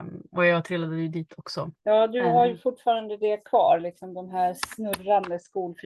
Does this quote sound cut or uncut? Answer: uncut